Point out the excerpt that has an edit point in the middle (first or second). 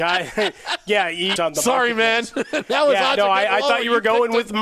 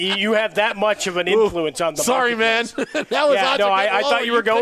first